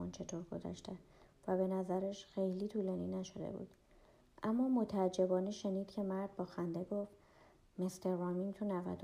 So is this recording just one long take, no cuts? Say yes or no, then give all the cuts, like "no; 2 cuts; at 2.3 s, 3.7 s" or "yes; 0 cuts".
yes; 0 cuts